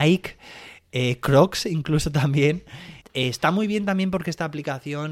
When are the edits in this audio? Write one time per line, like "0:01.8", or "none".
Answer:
0:03.0